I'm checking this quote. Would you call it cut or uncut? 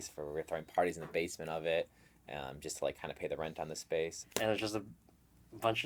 cut